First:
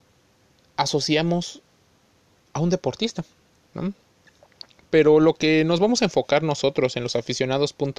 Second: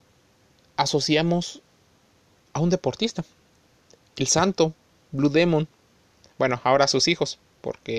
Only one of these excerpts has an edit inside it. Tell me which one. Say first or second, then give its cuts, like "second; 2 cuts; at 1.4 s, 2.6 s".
first; 1 cut; at 3.7 s